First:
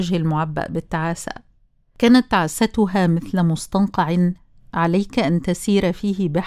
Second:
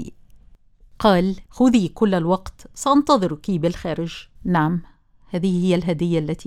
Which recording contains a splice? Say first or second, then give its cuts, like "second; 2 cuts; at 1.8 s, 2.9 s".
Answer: second; 2 cuts; at 1.5 s, 4.4 s